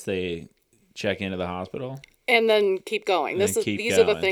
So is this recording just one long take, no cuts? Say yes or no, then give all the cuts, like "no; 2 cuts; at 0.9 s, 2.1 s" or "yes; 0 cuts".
yes; 0 cuts